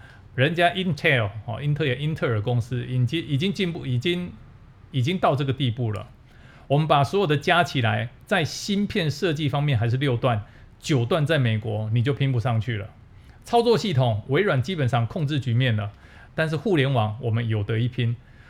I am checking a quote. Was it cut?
yes; 1 cut; at 16.3 s

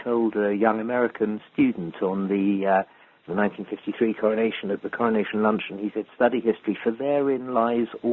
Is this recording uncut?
no; 2 cuts; at 3.3 s, 6.1 s

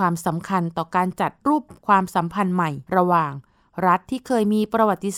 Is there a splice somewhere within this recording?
yes; 2 cuts; at 1.7 s, 2.9 s

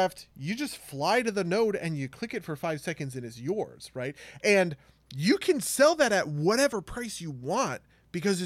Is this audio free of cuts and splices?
yes; 0 cuts

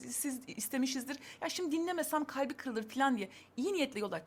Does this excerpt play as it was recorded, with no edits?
yes; 0 cuts

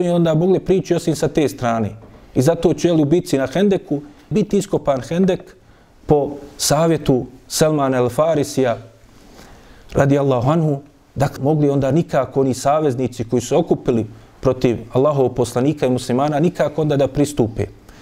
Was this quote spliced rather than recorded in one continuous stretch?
yes; 2 cuts; at 4.3 s, 11.4 s

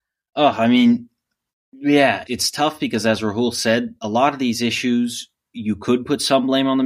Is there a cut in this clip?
yes; 1 cut; at 2.3 s

